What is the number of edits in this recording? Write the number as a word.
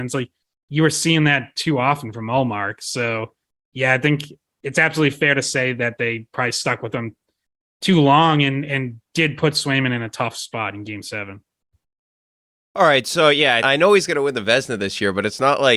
one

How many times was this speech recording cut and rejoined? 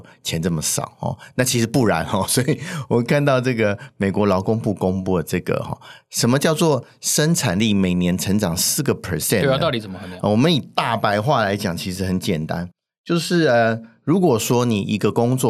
zero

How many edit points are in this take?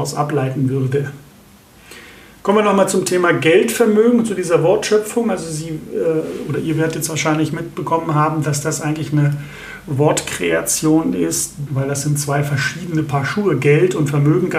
one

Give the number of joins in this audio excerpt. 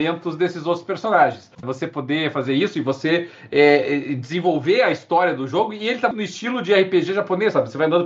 two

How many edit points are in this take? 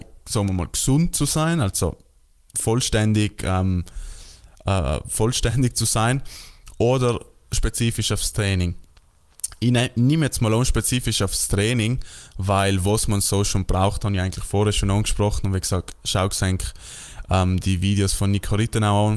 zero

